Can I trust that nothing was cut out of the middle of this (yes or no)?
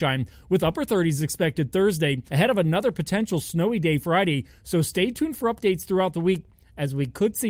no